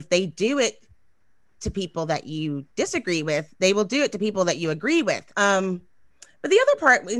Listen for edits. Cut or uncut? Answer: cut